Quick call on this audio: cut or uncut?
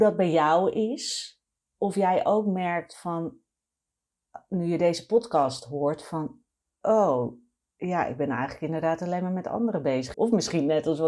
cut